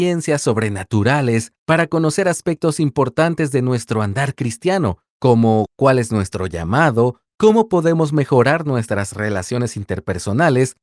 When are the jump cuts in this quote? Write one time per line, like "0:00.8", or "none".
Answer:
0:07.2